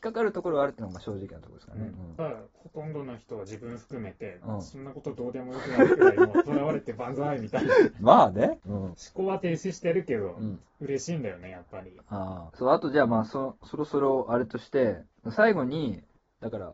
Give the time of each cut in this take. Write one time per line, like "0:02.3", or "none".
none